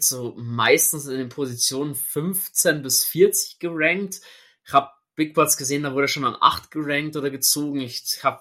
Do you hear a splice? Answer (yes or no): no